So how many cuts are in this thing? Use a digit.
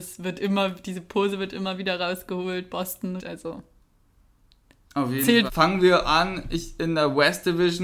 2